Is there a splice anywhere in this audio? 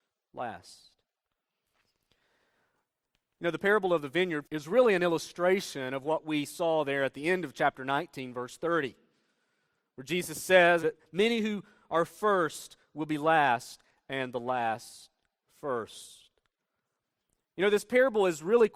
yes; 2 cuts; at 4.4 s, 10.8 s

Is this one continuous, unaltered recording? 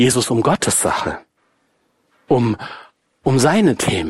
yes; 0 cuts

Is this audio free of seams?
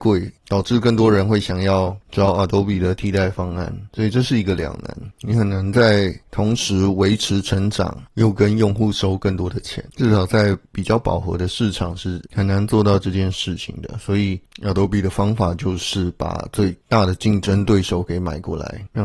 yes; 0 cuts

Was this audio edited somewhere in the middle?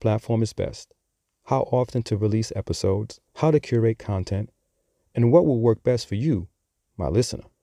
yes; 1 cut; at 3.3 s

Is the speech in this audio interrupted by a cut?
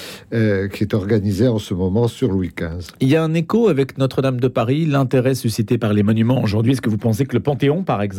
no; 0 cuts

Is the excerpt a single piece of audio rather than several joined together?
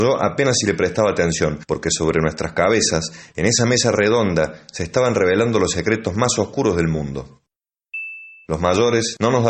no; 1 cut; at 8.4 s

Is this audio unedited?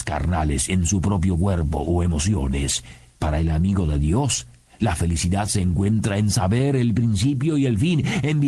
yes; 0 cuts

